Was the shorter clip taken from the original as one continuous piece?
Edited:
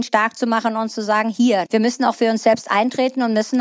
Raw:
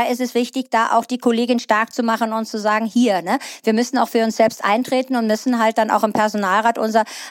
no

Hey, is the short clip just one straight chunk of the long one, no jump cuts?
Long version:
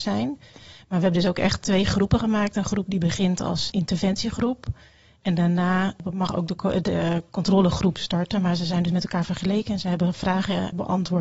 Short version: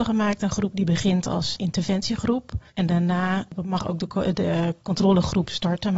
no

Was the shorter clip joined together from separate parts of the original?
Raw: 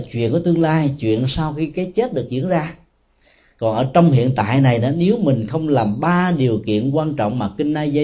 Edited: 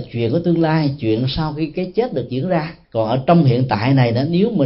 yes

